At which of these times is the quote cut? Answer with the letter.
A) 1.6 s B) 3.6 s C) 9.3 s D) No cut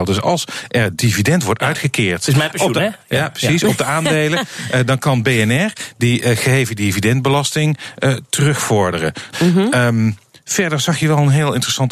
C